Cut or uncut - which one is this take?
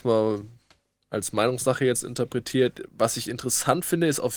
uncut